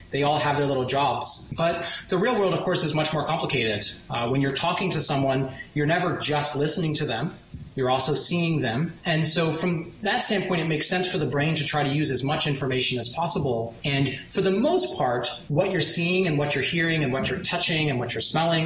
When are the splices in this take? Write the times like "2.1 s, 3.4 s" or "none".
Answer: none